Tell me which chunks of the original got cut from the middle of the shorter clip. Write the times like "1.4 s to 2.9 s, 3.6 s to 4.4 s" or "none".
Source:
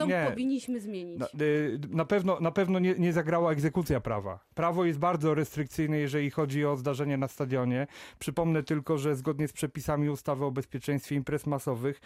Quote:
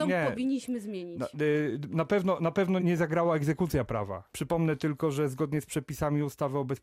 2.8 s to 3.0 s, 4.5 s to 8.2 s

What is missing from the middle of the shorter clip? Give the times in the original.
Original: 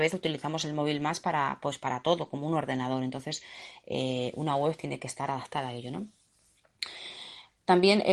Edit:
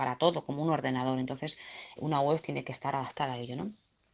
3.8 s to 4.3 s

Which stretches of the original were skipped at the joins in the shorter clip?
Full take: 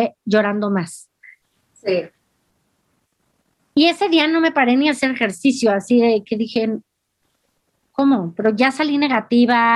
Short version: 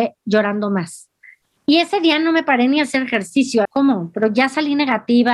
1.6 s to 3.7 s, 5.7 s to 7.9 s

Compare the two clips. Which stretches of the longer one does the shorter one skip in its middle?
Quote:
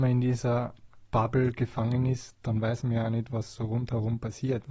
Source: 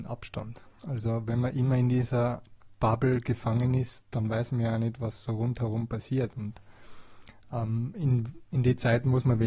none

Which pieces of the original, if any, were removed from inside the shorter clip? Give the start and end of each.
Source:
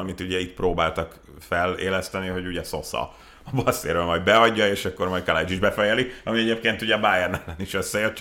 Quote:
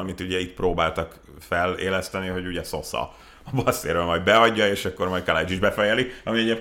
none

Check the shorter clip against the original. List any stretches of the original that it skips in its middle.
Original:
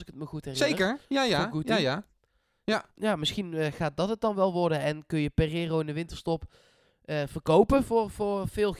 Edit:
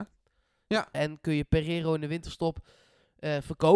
2.9 s to 4.8 s

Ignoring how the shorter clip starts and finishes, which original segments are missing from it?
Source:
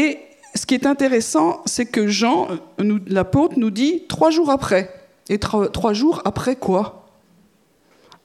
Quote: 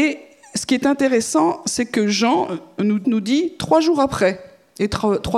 3.0 s to 3.5 s

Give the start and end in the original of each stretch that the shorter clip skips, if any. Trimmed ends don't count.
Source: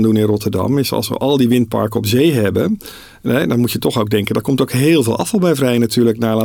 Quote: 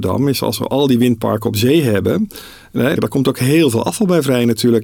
3.5 s to 4.3 s

